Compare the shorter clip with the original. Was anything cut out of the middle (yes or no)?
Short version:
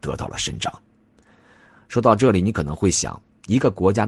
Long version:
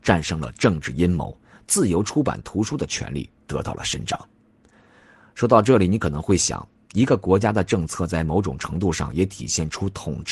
no